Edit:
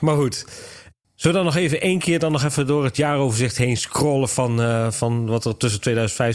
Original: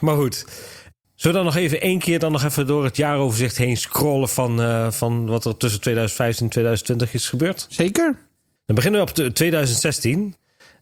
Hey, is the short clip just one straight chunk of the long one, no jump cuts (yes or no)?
yes